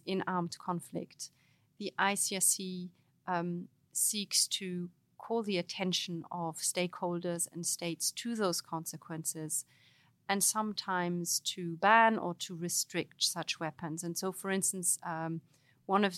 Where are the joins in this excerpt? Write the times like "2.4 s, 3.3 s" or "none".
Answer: none